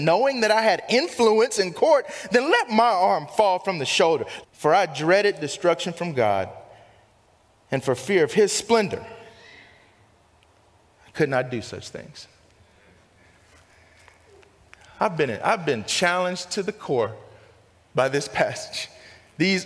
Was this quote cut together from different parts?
yes; 1 cut; at 4.4 s

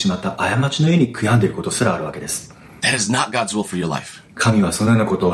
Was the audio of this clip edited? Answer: yes; 1 cut; at 4.2 s

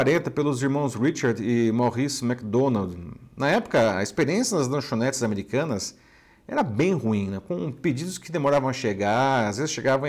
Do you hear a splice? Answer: no; 0 cuts

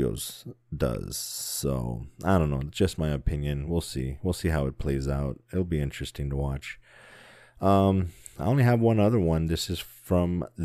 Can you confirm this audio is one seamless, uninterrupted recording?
yes; 0 cuts

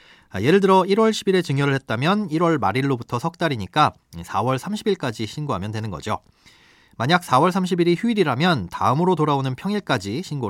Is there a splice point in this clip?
no; 0 cuts

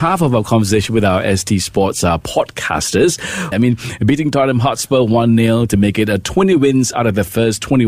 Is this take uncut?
no; 1 cut; at 3.5 s

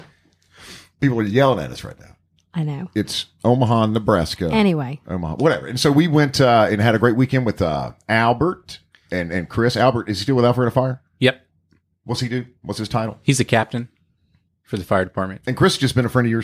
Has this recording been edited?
no; 0 cuts

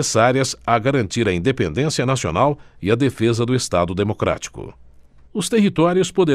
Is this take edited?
yes; 1 cut; at 5.3 s

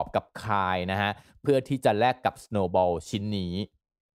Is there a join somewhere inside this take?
no; 0 cuts

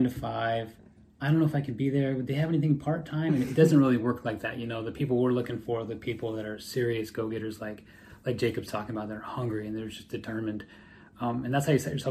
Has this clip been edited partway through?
no; 0 cuts

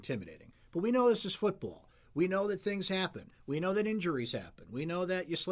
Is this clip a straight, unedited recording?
yes; 0 cuts

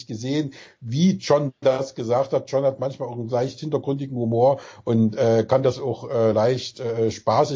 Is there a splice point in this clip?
no; 0 cuts

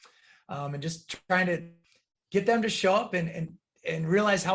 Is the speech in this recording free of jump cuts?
yes; 0 cuts

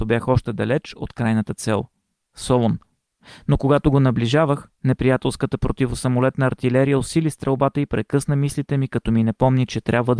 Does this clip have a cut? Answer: no; 0 cuts

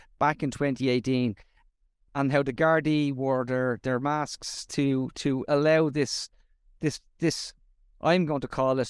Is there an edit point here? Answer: yes; 1 cut; at 2.1 s

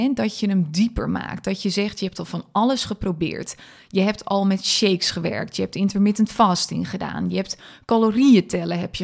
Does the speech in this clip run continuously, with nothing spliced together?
yes; 0 cuts

